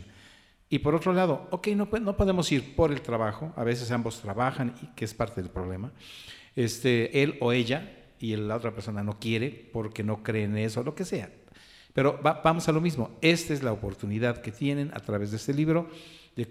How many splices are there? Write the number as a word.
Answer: one